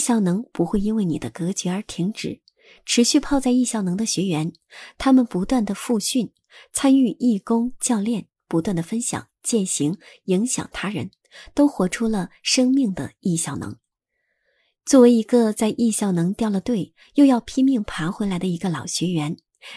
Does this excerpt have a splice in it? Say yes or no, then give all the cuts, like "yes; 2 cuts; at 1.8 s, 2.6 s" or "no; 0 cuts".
no; 0 cuts